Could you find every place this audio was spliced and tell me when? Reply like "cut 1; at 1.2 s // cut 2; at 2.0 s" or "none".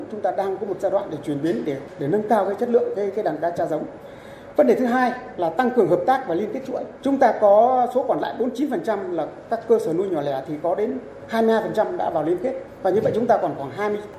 cut 1; at 7.0 s